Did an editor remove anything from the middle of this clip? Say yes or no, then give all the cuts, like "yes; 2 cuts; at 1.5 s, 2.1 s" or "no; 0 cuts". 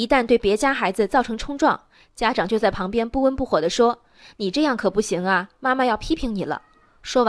no; 0 cuts